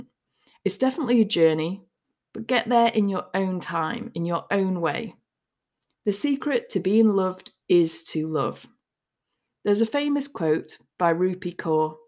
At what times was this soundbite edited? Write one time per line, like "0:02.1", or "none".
none